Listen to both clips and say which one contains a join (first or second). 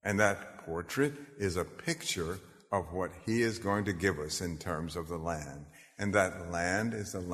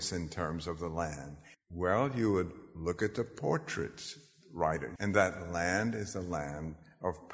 second